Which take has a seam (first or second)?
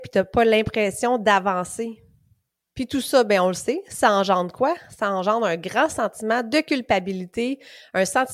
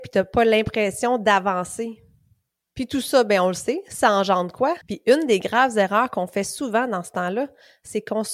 second